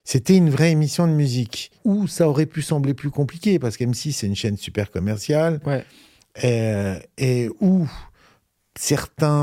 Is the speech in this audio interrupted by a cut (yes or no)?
no